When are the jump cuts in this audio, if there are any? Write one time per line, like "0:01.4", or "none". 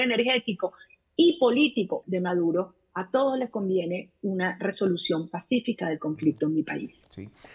0:02.0

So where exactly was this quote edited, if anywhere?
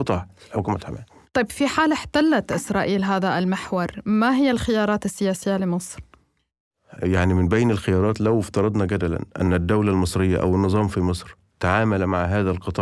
0:07.0

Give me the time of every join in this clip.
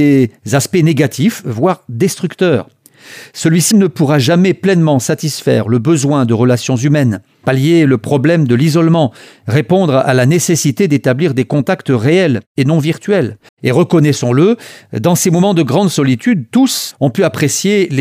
0:03.7
0:13.5
0:16.9

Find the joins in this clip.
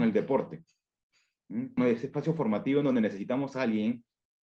0:01.8

